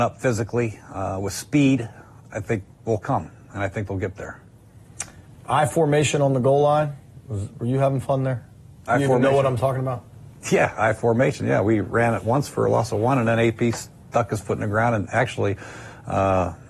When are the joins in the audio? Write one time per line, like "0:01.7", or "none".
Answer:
0:02.7